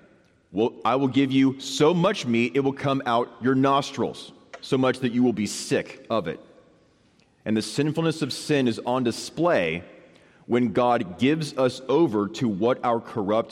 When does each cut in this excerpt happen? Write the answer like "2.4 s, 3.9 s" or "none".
none